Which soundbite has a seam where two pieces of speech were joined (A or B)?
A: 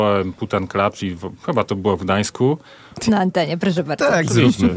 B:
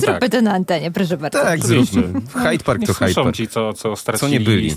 A